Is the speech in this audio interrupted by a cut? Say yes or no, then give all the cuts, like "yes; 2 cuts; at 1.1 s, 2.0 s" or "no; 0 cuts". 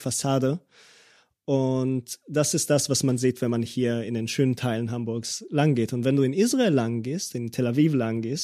no; 0 cuts